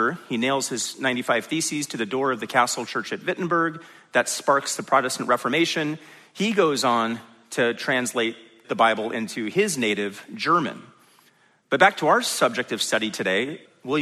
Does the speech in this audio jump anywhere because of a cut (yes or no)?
no